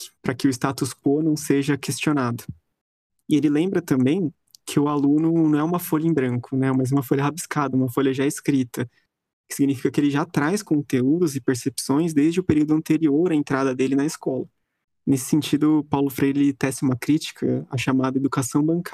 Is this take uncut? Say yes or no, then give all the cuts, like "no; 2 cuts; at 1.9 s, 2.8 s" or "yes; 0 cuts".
yes; 0 cuts